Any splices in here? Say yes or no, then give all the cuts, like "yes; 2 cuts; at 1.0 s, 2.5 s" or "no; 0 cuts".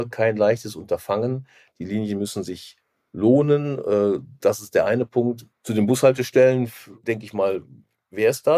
yes; 1 cut; at 5.5 s